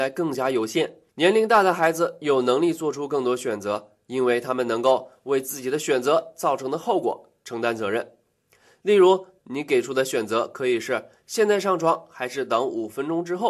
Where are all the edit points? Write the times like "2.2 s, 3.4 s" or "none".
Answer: 1.1 s, 9.4 s